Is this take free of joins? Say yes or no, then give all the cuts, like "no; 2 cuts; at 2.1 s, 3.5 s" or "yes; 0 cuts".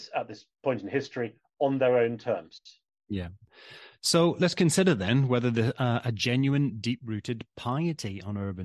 yes; 0 cuts